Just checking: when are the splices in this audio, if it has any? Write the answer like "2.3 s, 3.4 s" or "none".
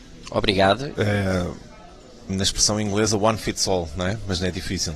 0.9 s, 2.3 s

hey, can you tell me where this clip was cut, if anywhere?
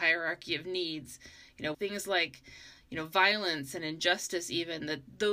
1.7 s

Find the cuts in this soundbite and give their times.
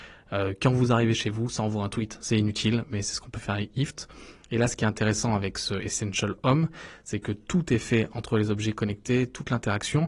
none

